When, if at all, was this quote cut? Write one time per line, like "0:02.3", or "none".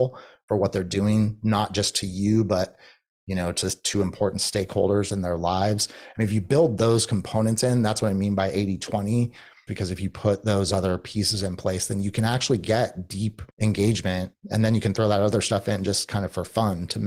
0:09.7
0:13.5

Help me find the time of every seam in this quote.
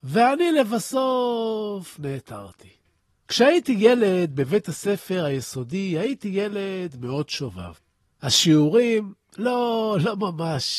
none

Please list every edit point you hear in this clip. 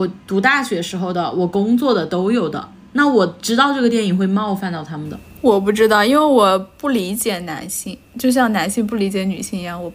none

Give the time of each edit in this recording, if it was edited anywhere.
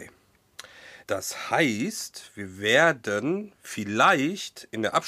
0:01.0

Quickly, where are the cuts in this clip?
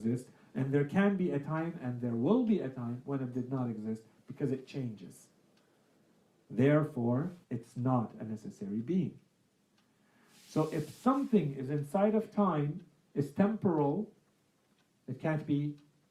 0:07.4

